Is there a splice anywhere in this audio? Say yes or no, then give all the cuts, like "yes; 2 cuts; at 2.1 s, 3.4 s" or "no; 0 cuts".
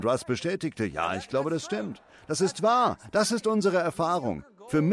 no; 0 cuts